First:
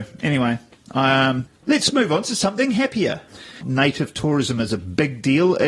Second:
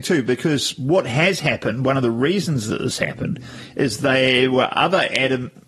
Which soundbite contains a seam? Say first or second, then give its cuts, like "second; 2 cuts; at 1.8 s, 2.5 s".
first; 1 cut; at 3.6 s